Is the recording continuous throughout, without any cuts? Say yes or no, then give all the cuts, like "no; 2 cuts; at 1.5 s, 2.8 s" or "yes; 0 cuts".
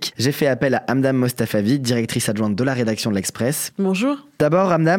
no; 1 cut; at 3.7 s